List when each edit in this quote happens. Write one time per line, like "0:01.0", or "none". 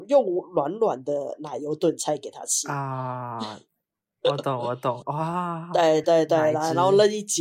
0:05.0
0:06.0